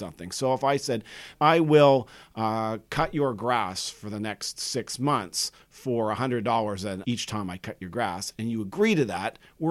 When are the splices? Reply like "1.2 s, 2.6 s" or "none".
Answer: 1.4 s